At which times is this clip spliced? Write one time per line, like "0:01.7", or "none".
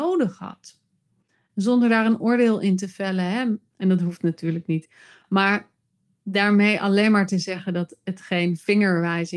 0:03.7